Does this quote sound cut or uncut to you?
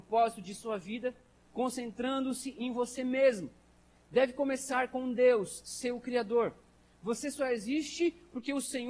uncut